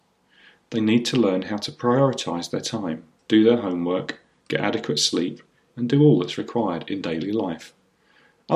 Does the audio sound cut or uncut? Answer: cut